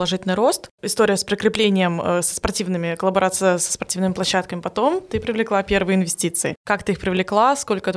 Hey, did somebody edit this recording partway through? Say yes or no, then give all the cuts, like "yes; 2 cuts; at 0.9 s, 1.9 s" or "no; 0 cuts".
no; 0 cuts